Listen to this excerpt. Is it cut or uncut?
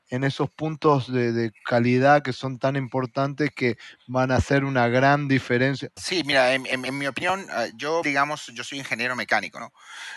cut